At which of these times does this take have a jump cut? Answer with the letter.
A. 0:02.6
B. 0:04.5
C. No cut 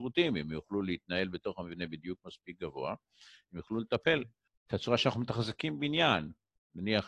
B